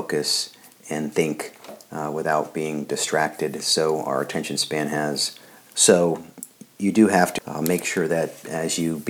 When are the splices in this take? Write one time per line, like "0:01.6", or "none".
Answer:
0:05.7
0:07.4